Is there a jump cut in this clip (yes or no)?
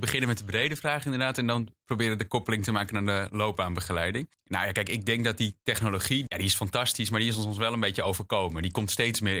no